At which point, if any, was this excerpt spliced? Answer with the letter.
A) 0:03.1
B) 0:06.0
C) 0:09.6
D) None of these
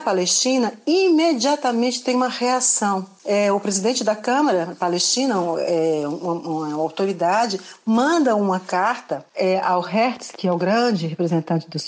D